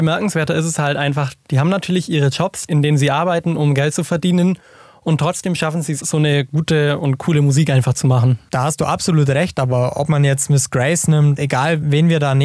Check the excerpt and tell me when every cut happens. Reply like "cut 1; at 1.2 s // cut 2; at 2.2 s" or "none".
cut 1; at 6.0 s // cut 2; at 11.4 s